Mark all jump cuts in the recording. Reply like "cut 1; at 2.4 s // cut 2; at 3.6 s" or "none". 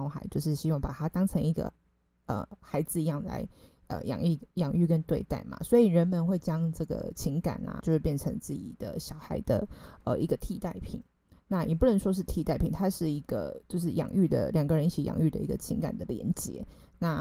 cut 1; at 7.8 s